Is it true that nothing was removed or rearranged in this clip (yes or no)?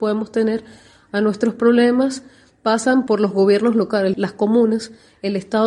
no